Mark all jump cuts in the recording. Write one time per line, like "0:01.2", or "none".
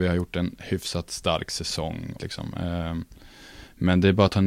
0:02.2